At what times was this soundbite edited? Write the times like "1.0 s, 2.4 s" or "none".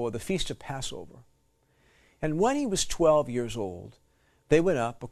none

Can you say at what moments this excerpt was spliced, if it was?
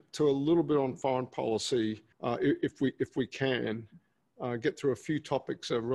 2.1 s

